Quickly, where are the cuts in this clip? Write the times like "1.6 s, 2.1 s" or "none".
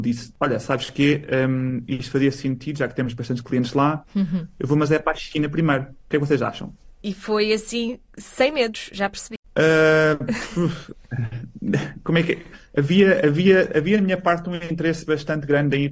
7.0 s